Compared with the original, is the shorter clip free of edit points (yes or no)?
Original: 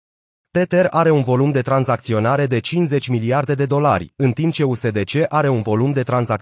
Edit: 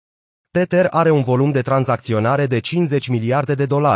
yes